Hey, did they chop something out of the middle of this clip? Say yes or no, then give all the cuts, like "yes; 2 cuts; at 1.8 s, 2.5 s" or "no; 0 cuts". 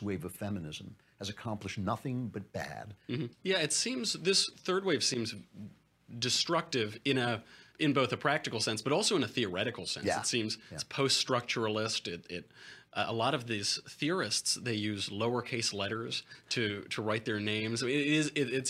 yes; 2 cuts; at 3.3 s, 7.7 s